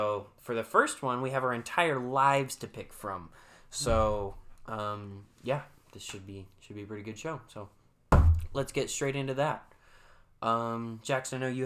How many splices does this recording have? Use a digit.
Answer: 0